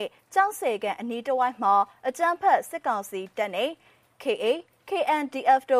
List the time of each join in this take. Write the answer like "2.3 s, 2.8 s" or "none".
none